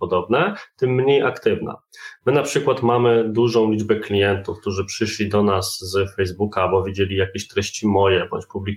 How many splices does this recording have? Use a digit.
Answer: 0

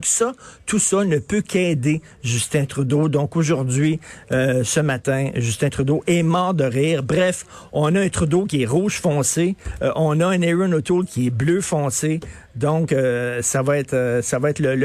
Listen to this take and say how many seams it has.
0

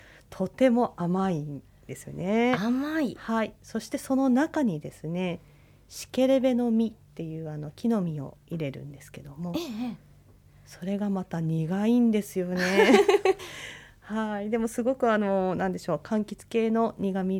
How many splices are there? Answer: 1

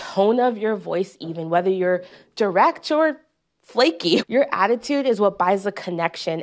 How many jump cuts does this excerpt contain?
1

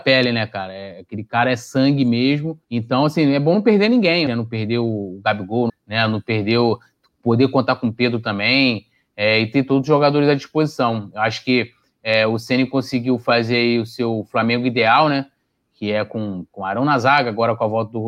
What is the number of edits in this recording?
3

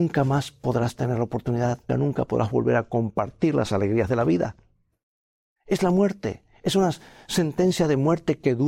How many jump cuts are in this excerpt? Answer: 2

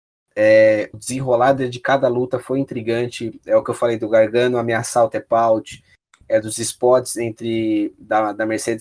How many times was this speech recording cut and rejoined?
1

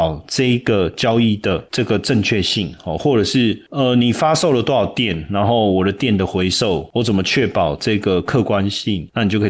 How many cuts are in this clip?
0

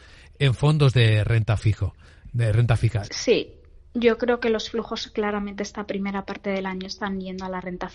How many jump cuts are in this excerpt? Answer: 1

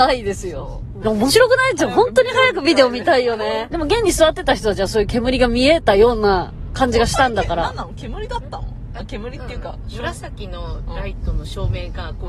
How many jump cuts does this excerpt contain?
2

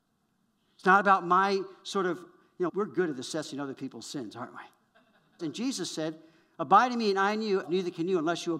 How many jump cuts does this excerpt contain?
3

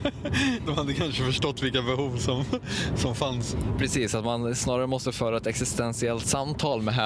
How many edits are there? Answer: 0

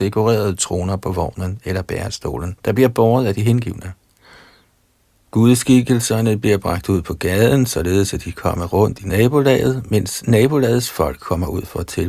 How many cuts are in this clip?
1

